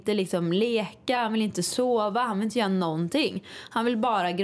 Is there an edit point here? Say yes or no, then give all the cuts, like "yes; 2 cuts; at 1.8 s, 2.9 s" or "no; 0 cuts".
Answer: no; 0 cuts